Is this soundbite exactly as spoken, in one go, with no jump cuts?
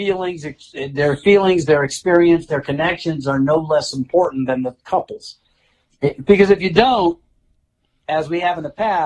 no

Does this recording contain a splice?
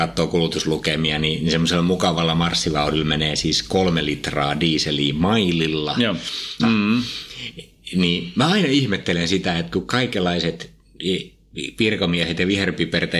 yes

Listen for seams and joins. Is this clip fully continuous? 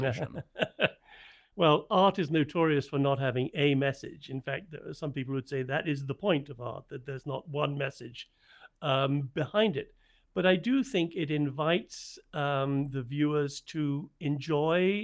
yes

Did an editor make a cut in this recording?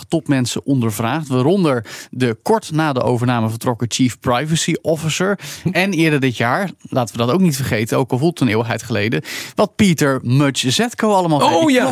no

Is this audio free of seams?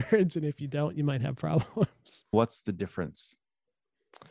no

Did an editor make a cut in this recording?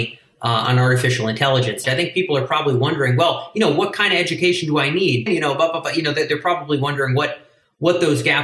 yes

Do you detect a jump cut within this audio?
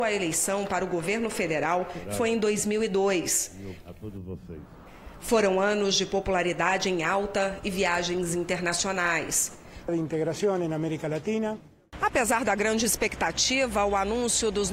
yes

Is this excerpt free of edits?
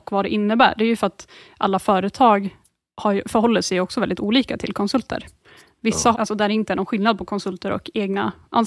no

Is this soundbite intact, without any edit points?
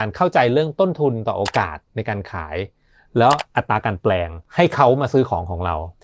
yes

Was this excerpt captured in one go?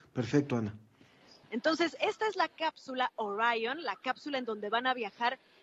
no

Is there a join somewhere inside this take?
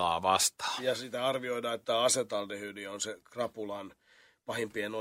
yes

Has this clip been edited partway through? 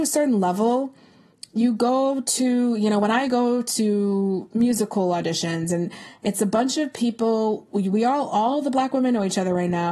no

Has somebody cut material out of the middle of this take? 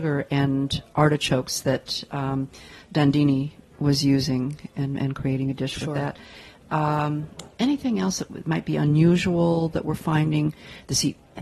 no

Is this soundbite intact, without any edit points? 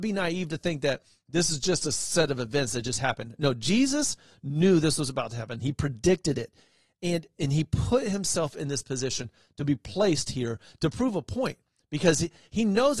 yes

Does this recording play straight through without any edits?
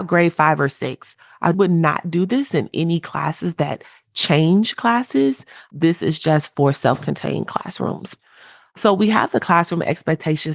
no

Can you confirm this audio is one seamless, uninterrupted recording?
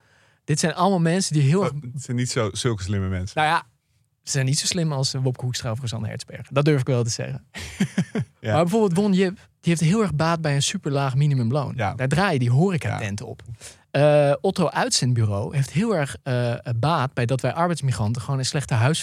yes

